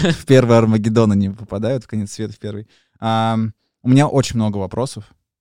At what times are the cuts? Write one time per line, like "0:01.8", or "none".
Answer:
none